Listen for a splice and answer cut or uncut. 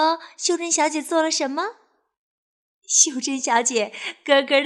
cut